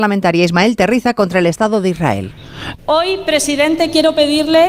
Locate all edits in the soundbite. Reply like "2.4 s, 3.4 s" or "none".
2.7 s